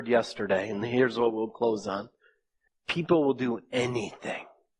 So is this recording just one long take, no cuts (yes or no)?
no